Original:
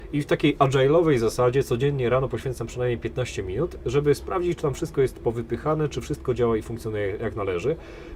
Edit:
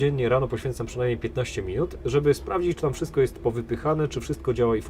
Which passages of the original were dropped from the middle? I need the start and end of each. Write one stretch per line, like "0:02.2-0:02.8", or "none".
none